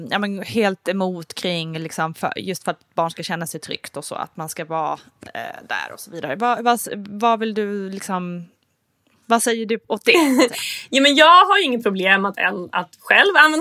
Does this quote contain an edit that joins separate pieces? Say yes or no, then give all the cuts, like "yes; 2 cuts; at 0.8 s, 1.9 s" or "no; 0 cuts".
no; 0 cuts